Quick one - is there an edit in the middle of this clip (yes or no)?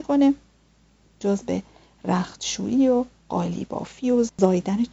no